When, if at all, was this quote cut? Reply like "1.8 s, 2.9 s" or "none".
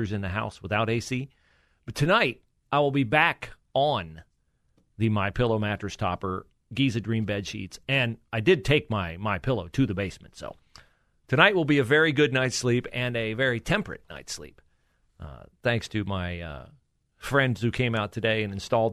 none